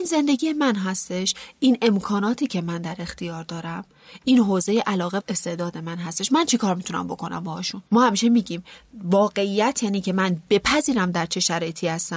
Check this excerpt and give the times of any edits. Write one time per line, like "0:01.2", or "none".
0:05.2
0:07.9